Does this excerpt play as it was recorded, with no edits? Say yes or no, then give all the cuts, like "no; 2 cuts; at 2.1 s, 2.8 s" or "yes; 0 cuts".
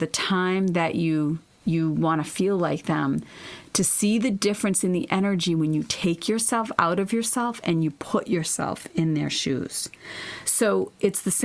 yes; 0 cuts